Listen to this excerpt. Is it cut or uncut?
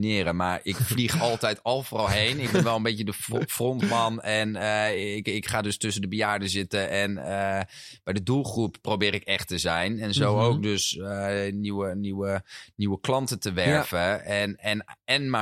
uncut